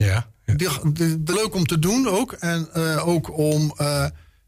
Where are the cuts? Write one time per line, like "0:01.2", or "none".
0:01.3